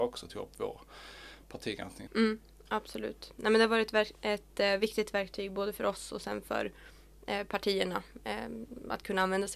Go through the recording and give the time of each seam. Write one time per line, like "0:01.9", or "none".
0:02.1